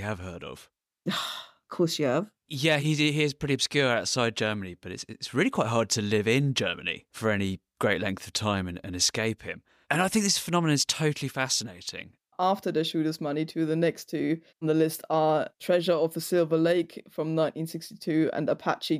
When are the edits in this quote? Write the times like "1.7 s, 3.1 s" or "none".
2.8 s, 12.3 s, 14.5 s